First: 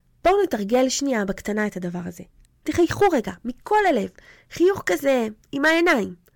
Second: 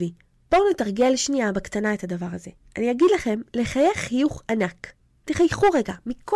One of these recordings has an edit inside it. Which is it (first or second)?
first